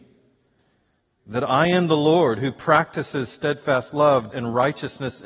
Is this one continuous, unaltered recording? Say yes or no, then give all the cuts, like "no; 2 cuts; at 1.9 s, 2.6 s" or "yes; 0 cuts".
no; 1 cut; at 4.3 s